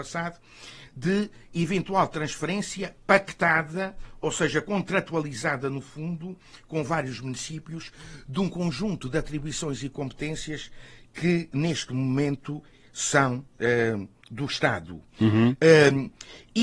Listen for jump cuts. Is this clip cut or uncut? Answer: uncut